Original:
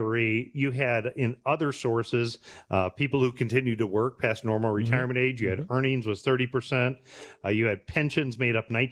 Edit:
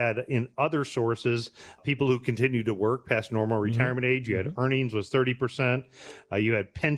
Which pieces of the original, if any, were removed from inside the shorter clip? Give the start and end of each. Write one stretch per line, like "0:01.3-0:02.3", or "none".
0:02.7-0:02.9